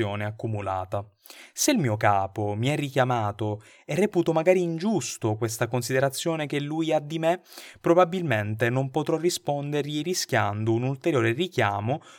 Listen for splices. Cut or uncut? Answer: uncut